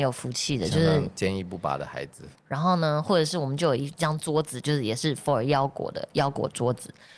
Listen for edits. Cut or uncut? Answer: cut